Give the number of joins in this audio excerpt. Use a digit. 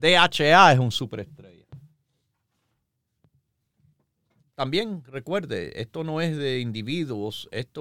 1